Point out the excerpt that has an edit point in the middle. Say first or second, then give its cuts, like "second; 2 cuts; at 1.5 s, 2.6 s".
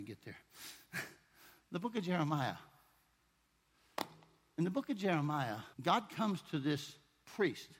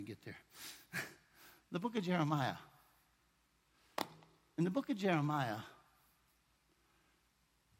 first; 1 cut; at 5.7 s